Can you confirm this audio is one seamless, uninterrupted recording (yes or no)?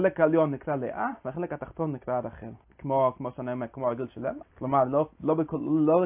no